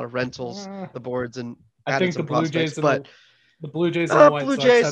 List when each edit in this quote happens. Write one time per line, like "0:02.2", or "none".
0:00.9